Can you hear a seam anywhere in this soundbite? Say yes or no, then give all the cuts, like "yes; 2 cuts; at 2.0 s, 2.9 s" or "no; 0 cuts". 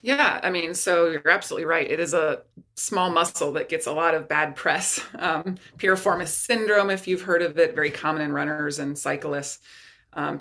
no; 0 cuts